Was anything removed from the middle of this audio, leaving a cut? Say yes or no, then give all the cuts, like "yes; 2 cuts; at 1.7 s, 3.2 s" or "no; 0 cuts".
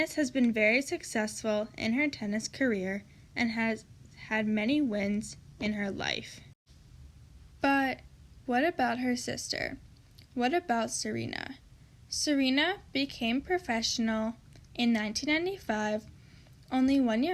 no; 0 cuts